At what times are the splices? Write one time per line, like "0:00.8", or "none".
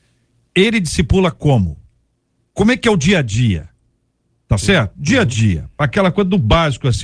none